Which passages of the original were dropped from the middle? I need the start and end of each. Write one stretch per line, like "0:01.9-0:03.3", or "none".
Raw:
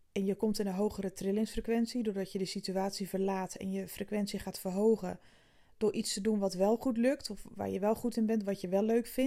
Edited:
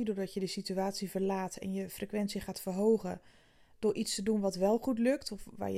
none